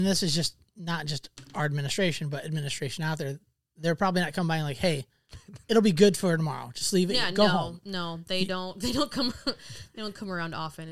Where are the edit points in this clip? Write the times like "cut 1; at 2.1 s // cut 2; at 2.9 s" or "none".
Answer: none